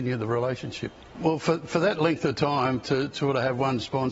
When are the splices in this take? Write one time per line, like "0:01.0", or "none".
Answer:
0:01.1